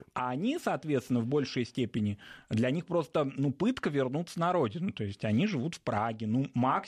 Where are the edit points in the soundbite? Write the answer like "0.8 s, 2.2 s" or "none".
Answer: none